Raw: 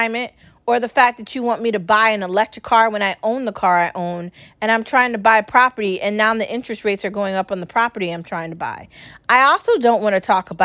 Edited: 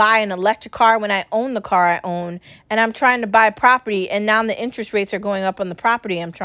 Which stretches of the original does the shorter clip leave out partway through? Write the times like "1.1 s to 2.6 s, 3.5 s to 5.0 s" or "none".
none